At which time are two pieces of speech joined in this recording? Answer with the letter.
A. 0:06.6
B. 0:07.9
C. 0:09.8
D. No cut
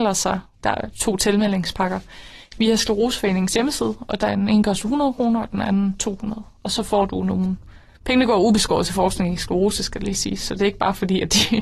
D